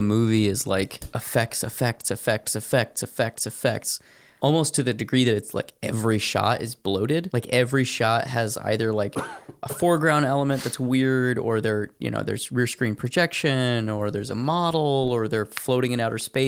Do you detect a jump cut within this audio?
no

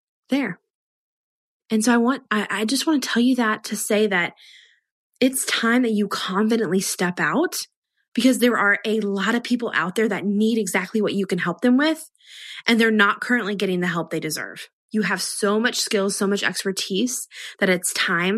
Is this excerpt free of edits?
no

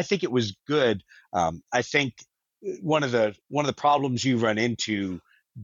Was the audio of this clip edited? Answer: yes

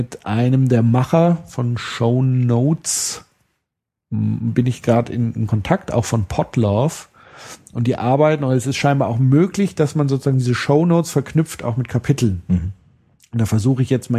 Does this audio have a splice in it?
no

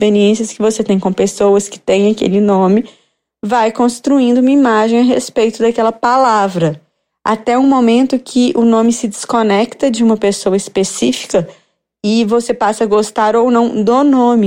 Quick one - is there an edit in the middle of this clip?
no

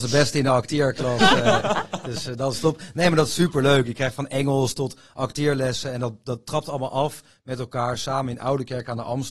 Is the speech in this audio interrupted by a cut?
no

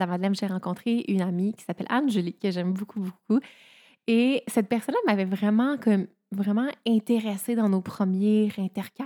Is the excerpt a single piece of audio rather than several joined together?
yes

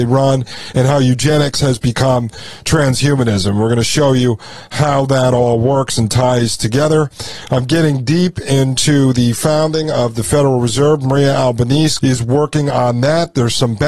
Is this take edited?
yes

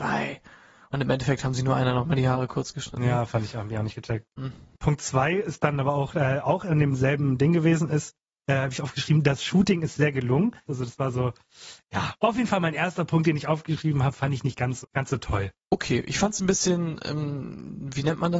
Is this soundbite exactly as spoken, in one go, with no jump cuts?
no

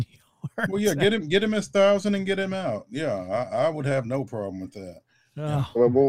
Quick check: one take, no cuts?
yes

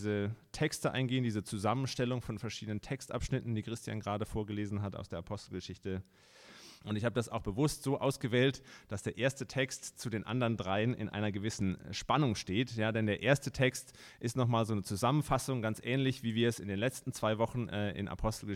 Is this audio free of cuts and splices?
no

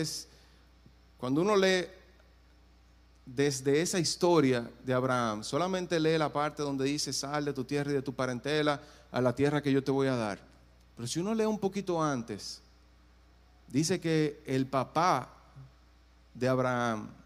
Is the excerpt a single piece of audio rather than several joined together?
yes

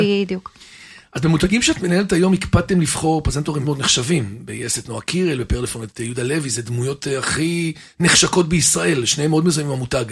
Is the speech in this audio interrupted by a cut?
yes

